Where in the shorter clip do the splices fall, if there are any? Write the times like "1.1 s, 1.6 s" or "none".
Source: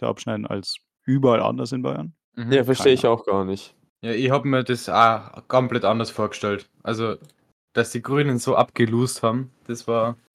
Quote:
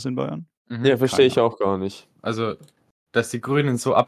2.2 s